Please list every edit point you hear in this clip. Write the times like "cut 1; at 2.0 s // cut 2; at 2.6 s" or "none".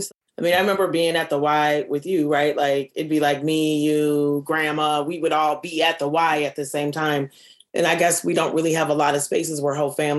none